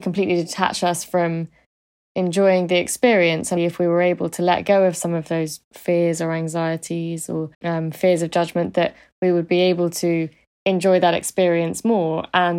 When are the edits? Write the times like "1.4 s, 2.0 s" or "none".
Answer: 3.6 s, 7.5 s